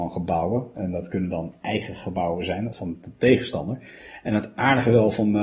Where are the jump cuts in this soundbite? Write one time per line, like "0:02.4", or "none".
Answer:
0:02.7

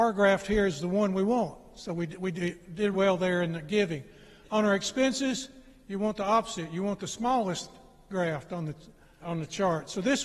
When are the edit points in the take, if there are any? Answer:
0:02.9
0:09.2

